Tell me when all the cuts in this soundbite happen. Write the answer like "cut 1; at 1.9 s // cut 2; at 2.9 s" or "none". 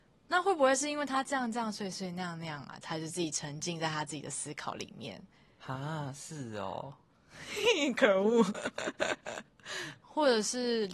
cut 1; at 2.8 s // cut 2; at 10.0 s